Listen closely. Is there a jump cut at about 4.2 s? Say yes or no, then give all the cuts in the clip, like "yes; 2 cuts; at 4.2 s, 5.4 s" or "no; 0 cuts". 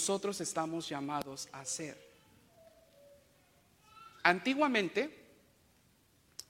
yes; 1 cut; at 4.2 s